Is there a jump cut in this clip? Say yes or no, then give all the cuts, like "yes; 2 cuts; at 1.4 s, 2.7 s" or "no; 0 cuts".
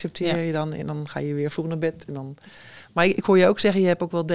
no; 0 cuts